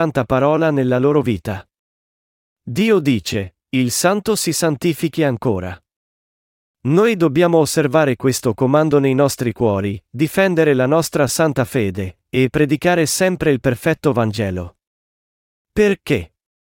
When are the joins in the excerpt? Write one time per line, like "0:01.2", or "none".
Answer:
none